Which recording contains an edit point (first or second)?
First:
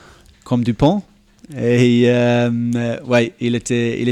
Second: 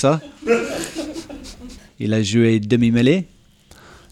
second